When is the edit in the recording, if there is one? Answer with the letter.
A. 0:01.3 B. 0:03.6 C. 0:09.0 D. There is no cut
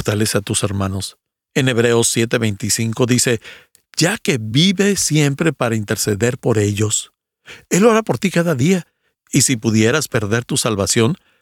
A